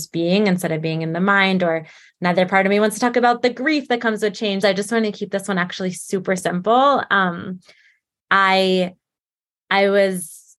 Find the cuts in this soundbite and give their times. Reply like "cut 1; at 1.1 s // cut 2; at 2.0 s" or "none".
cut 1; at 4.6 s